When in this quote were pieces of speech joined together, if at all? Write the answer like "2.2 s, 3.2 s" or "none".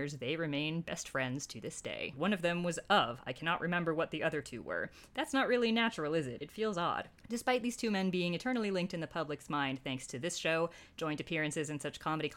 2.1 s, 6.4 s